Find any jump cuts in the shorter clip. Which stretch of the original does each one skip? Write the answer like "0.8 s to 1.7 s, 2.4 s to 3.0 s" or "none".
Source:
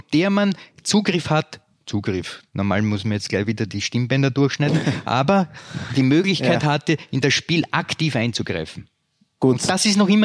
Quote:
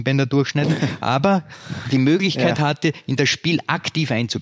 none